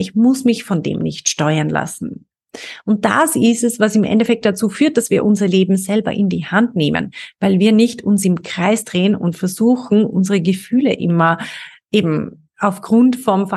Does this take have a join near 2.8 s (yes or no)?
no